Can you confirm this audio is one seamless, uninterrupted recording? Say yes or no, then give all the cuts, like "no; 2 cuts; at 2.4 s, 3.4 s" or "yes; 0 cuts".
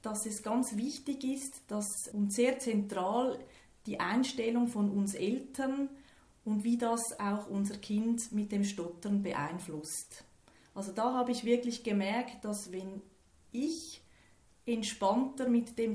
no; 1 cut; at 2.1 s